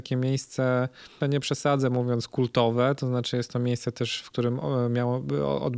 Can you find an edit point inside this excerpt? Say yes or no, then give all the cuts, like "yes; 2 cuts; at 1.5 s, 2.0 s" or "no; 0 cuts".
yes; 1 cut; at 1.2 s